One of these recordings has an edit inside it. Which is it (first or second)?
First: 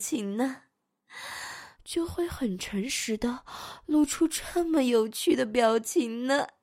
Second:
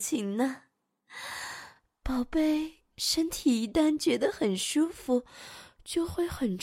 first